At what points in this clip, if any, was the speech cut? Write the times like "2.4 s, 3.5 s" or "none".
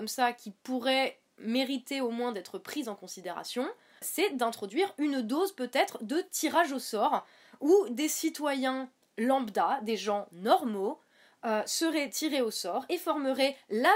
4.0 s